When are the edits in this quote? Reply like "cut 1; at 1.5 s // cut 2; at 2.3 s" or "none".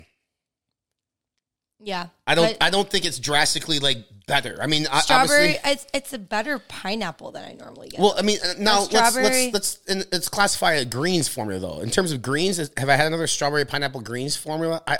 none